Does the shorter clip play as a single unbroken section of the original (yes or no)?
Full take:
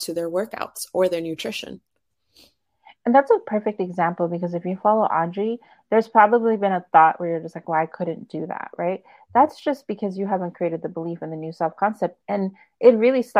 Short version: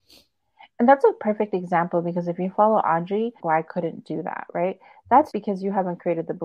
no